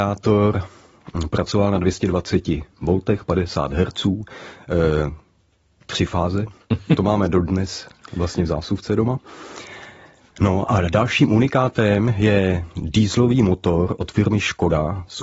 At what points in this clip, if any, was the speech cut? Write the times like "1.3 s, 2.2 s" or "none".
none